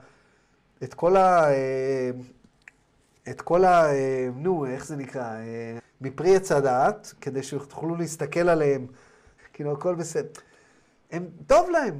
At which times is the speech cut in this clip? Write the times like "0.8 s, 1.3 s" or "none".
5.8 s, 9.4 s